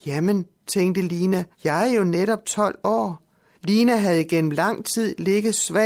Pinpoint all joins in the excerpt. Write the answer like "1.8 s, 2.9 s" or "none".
1.5 s, 3.5 s